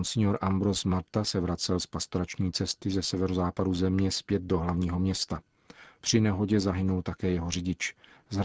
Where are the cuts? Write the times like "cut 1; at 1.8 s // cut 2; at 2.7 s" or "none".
none